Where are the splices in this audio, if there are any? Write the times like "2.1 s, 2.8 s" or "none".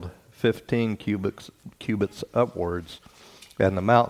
none